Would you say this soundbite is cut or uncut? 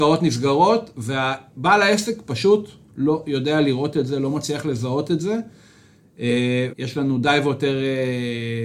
cut